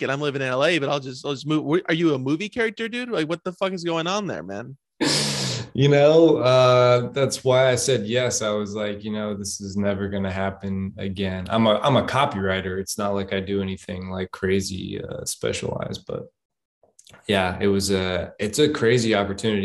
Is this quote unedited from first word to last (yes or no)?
yes